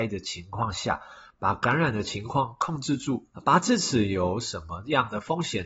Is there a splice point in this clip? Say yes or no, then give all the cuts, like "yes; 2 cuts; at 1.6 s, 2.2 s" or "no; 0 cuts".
yes; 2 cuts; at 1.3 s, 3.3 s